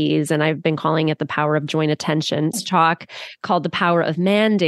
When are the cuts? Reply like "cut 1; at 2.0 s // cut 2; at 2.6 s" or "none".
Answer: cut 1; at 2.5 s